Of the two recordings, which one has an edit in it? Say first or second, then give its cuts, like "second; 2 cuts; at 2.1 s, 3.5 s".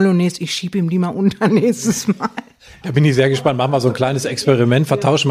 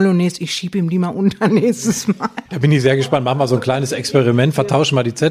second; 1 cut; at 2.5 s